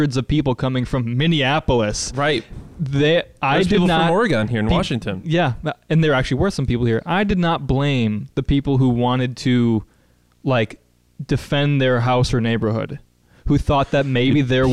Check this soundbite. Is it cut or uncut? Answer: uncut